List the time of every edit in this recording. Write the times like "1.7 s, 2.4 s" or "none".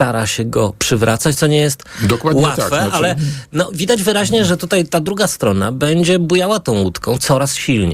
none